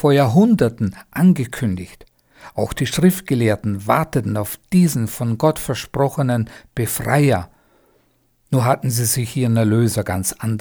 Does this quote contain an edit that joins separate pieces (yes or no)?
no